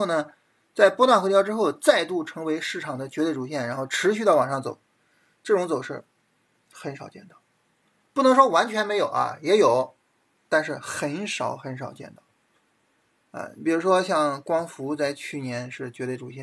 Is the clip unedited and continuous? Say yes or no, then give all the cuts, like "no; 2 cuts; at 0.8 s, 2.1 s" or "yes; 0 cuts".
yes; 0 cuts